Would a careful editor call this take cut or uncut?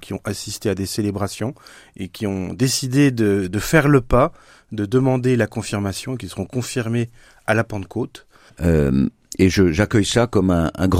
cut